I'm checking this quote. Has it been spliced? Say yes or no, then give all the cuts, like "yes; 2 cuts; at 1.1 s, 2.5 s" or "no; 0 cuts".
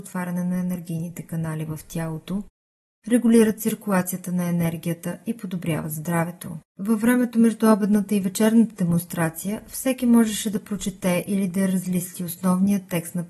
yes; 1 cut; at 6.7 s